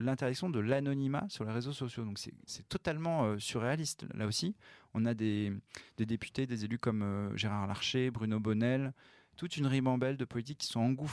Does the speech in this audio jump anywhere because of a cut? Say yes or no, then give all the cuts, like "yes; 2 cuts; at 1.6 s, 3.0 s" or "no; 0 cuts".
no; 0 cuts